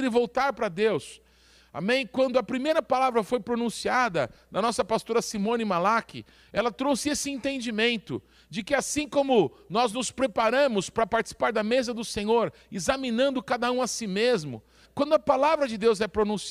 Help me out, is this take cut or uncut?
cut